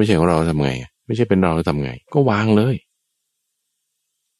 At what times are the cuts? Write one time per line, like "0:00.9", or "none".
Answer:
0:00.9
0:02.0